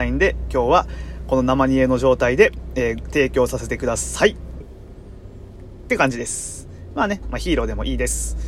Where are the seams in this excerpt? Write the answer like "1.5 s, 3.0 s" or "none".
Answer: 4.6 s, 7.2 s